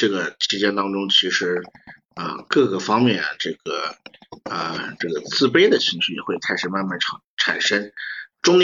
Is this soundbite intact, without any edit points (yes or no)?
yes